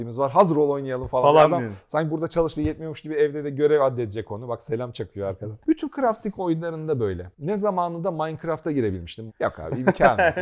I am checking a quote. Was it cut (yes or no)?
yes